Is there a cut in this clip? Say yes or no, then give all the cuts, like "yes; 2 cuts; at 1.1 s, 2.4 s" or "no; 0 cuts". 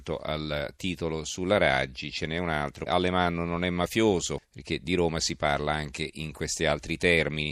yes; 2 cuts; at 2.9 s, 4.4 s